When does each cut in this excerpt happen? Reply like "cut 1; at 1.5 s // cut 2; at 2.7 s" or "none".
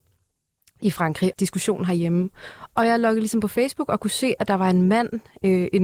cut 1; at 1.3 s